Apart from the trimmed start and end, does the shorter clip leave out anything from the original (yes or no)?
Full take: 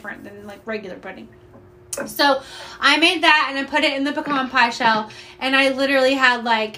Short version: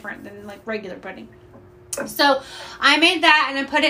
no